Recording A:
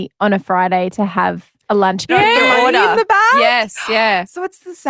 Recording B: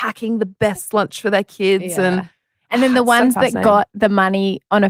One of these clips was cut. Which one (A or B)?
A